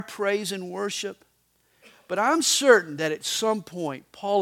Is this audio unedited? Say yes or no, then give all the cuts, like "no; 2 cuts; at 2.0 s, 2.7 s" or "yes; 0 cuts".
yes; 0 cuts